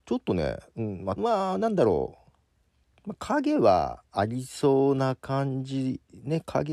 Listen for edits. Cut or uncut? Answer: cut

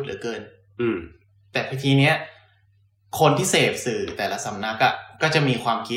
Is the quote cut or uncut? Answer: uncut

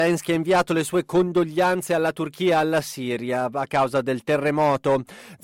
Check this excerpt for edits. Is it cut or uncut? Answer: uncut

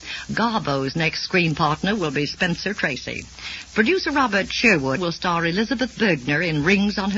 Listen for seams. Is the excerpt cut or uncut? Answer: cut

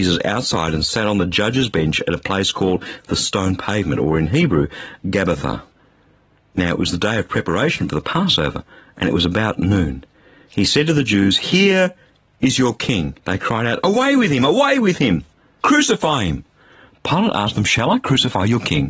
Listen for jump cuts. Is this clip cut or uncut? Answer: cut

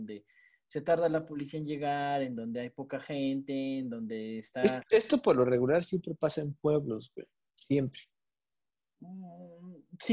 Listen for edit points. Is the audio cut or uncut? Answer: uncut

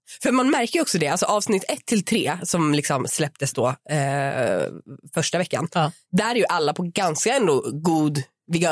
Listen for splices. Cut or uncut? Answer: uncut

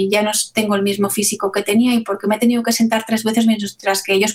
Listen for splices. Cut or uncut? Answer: uncut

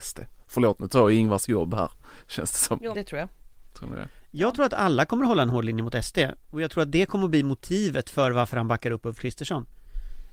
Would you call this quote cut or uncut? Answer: cut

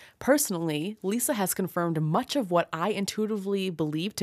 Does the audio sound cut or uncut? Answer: uncut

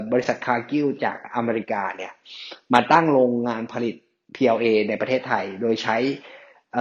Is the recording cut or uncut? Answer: uncut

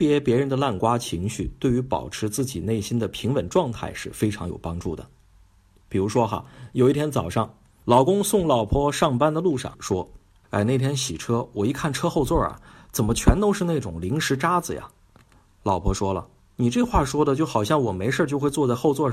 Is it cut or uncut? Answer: uncut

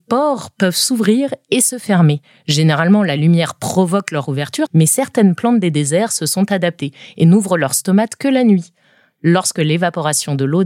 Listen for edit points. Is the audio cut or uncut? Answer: cut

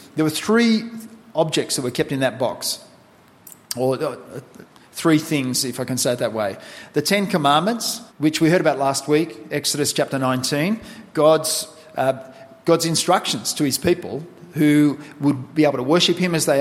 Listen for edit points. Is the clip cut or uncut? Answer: cut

